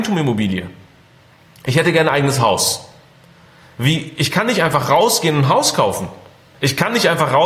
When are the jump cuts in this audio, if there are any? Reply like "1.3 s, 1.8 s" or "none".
none